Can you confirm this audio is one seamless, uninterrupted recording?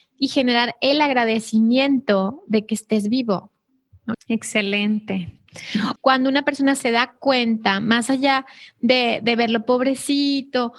no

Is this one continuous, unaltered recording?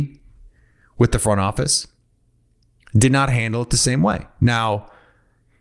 yes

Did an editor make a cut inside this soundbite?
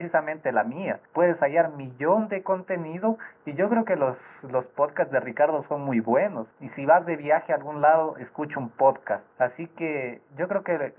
yes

